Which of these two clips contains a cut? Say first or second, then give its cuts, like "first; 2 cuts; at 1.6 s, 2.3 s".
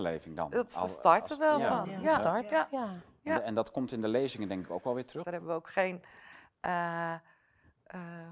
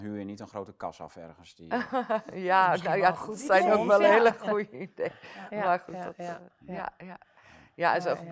first; 1 cut; at 5.2 s